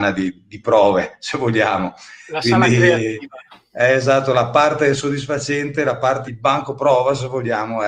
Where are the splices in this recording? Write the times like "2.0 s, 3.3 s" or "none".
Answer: 6.2 s